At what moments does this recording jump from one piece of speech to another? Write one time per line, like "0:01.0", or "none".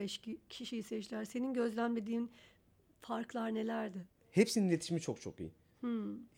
0:04.2

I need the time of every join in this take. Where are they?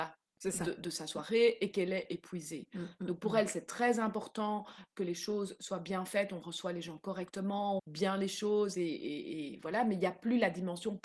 0:07.8

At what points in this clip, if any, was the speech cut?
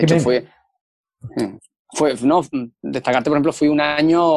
none

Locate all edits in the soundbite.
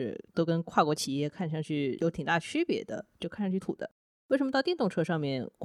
0:03.6

